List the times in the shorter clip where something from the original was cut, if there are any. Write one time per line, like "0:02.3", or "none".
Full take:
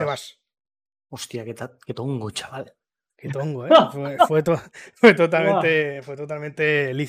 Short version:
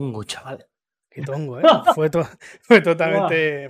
0:01.8

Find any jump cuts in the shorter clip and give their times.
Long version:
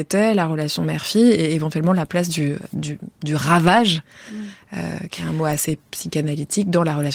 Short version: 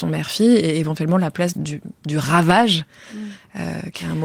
0:01.5

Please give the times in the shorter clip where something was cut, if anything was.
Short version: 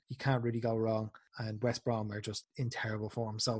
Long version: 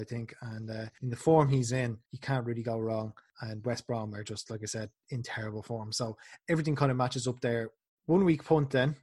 0:02.4

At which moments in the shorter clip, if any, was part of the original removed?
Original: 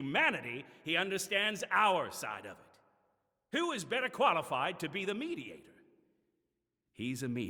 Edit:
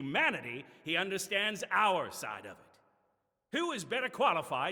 none

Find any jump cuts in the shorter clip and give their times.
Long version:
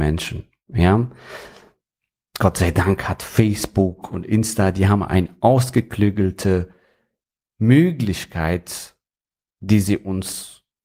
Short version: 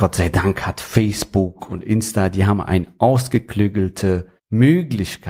0:04.4

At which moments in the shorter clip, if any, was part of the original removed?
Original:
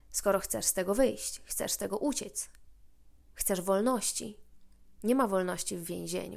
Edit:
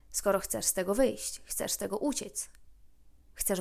none

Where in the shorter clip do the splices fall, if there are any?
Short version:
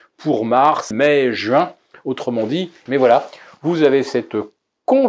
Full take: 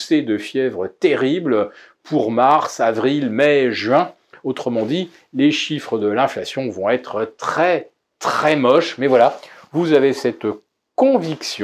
0:00.9
0:02.9

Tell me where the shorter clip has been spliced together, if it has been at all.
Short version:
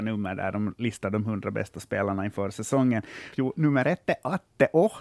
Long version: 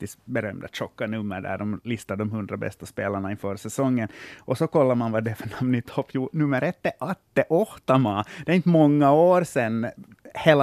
0:03.3

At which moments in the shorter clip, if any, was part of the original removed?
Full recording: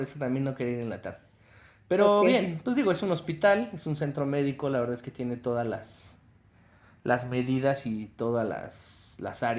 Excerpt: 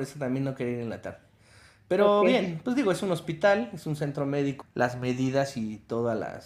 0:04.6

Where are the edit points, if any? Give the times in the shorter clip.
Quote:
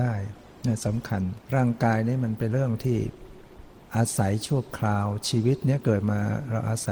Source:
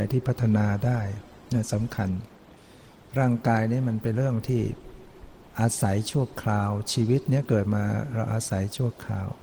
0:01.4

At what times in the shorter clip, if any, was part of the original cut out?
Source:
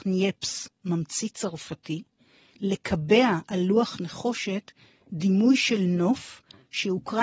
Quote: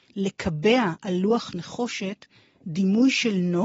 none

